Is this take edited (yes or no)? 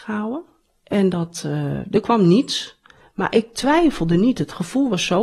no